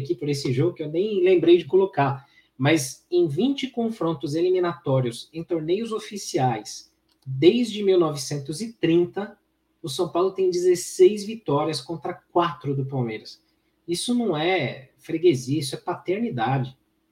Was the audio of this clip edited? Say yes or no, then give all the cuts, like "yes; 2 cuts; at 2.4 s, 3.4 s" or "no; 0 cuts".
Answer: no; 0 cuts